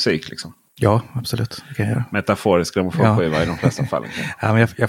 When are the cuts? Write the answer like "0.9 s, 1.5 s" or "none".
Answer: none